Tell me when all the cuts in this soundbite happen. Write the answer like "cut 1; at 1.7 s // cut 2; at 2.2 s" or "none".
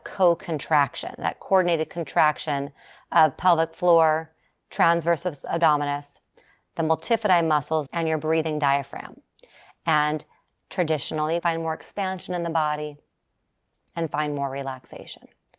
cut 1; at 7.9 s // cut 2; at 11.4 s